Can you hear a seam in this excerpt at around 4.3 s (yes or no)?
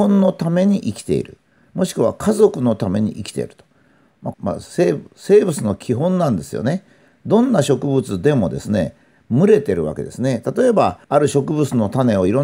yes